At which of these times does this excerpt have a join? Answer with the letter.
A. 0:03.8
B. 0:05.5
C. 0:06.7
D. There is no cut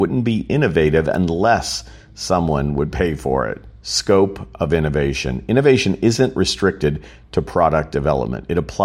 A